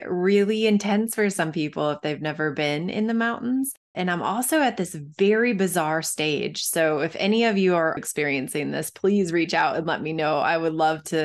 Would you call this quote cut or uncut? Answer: cut